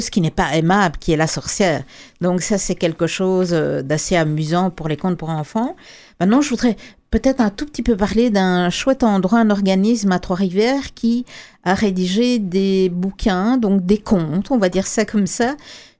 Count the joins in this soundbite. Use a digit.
0